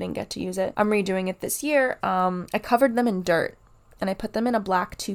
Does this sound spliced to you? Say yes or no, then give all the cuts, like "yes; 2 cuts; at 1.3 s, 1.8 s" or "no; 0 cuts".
yes; 1 cut; at 2.0 s